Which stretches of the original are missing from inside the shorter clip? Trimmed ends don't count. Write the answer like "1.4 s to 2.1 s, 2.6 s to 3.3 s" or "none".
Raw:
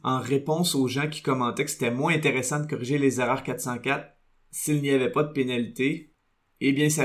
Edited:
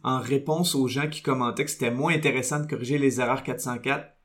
none